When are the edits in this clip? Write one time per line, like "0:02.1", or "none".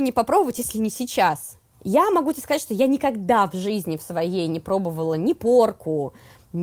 0:01.7